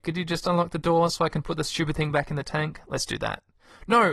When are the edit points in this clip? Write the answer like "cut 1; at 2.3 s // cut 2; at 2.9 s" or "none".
none